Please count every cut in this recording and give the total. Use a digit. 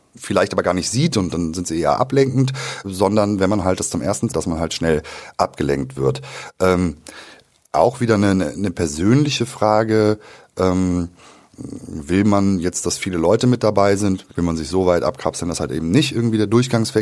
3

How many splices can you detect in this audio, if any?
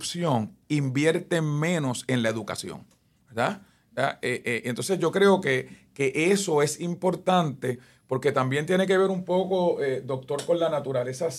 1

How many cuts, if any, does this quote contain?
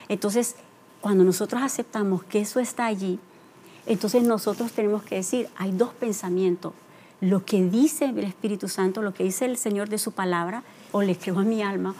1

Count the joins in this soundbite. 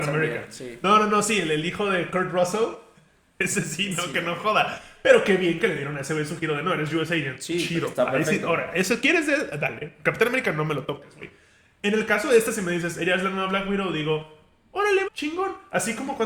1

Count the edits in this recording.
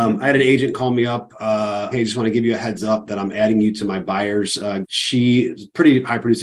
2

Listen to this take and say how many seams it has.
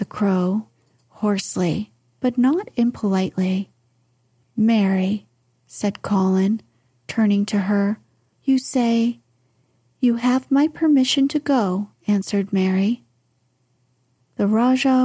3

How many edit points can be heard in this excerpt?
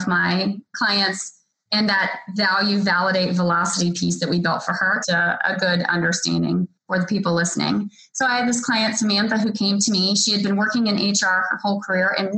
1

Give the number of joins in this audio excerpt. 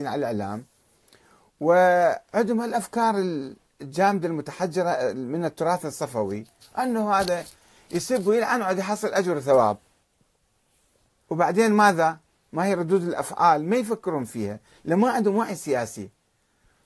0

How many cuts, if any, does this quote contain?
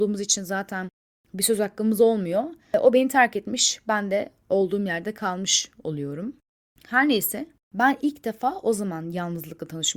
0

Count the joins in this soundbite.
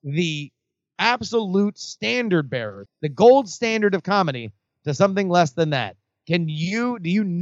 1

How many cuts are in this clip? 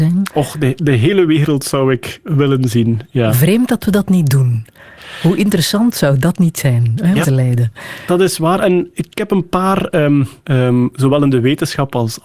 2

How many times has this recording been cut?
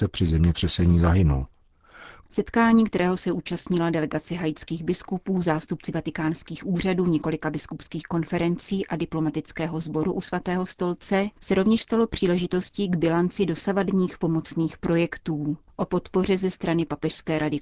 1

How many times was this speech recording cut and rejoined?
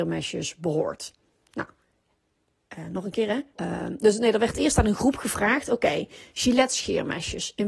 1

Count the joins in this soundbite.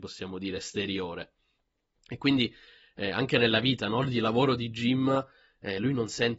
0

